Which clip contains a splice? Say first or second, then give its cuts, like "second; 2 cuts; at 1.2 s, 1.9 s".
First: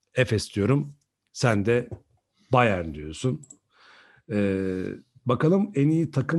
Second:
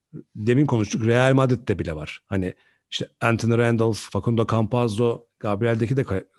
second; 1 cut; at 4.1 s